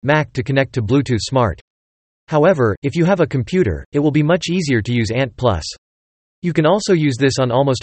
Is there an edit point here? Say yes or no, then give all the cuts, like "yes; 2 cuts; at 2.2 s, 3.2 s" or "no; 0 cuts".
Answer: no; 0 cuts